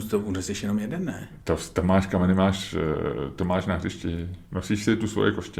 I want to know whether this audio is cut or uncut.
uncut